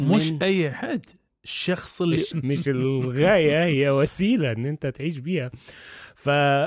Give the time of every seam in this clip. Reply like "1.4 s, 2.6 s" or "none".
2.3 s